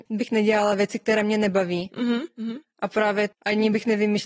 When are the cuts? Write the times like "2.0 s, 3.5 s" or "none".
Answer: 3.3 s